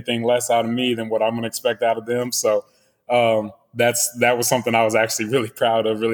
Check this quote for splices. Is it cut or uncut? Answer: uncut